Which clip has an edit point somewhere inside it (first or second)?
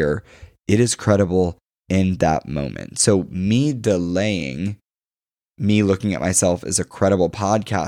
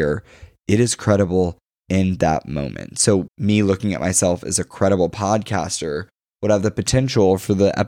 second